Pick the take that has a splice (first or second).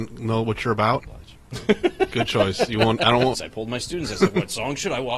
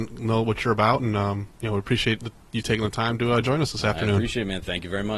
first